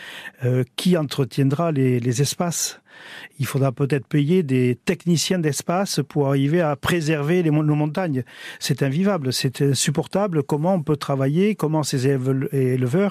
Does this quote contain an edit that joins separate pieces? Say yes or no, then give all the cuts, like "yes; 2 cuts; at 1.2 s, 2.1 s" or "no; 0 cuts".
no; 0 cuts